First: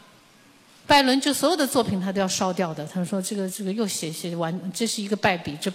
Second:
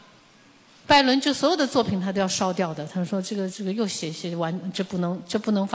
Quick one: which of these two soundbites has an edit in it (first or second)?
second